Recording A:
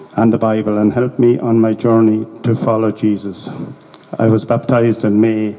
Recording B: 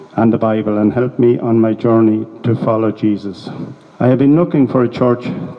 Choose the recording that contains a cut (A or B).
B